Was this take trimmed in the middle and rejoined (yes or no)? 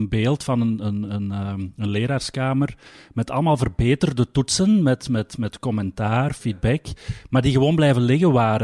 no